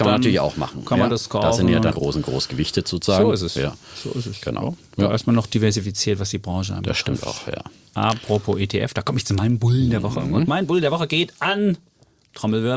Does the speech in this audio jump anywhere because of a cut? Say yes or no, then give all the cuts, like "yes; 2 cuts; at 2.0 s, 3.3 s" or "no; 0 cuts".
yes; 1 cut; at 1.9 s